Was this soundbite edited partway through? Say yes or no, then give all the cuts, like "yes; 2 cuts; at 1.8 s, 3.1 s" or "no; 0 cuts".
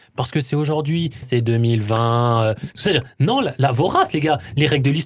yes; 1 cut; at 1.2 s